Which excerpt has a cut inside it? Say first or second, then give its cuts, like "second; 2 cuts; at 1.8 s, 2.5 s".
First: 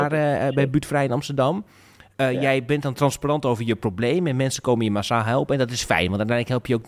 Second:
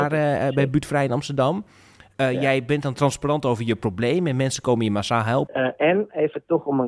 second; 1 cut; at 5.5 s